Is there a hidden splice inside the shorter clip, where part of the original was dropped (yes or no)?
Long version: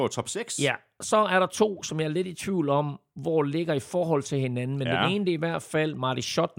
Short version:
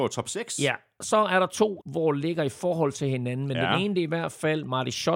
yes